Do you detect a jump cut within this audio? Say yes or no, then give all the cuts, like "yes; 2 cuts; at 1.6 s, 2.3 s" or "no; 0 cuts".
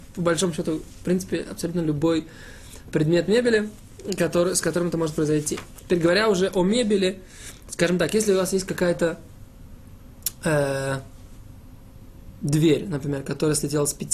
no; 0 cuts